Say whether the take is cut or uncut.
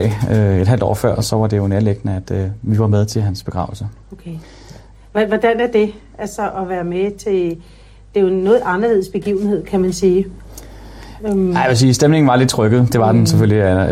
uncut